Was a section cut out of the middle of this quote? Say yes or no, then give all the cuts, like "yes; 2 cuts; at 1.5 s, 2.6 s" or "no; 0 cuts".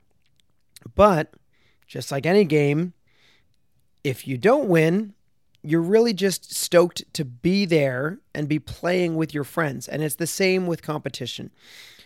no; 0 cuts